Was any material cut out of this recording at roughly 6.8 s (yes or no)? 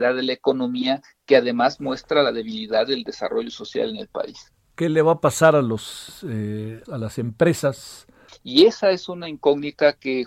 yes